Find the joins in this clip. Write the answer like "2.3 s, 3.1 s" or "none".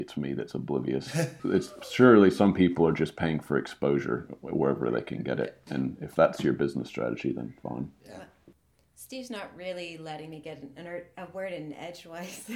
1.4 s

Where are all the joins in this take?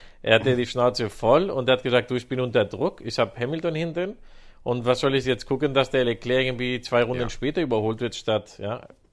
none

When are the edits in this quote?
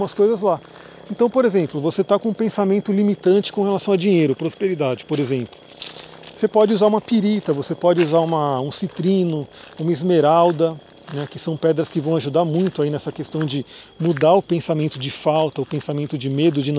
none

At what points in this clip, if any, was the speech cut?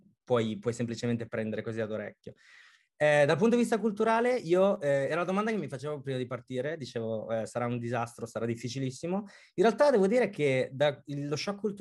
none

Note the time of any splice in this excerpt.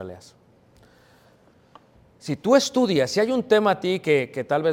2.1 s

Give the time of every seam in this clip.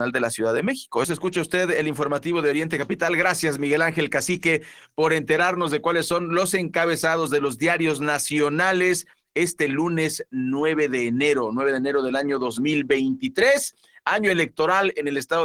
1.0 s

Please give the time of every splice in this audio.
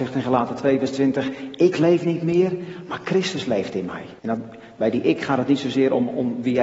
4.2 s

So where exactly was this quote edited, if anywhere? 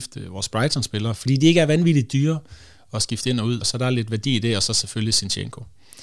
3.6 s

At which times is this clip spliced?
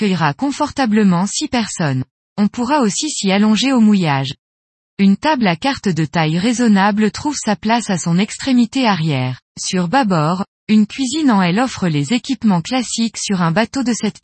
4.8 s, 9.5 s

